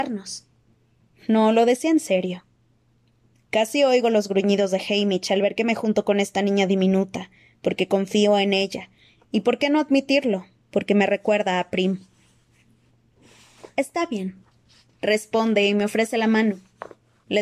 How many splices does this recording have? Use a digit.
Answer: 1